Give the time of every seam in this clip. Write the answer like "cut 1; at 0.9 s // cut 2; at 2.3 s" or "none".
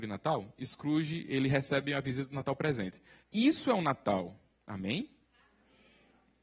cut 1; at 3.2 s // cut 2; at 4.5 s